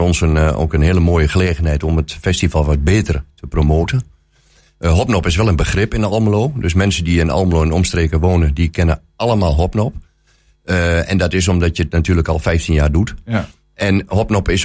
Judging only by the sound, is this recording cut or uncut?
uncut